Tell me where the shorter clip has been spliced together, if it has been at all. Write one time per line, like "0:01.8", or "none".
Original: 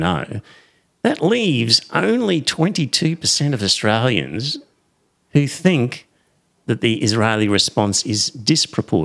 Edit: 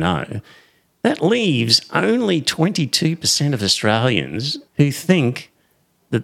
0:04.7